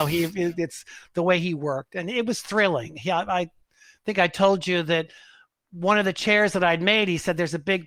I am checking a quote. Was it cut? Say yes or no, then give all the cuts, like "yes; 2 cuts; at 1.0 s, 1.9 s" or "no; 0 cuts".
no; 0 cuts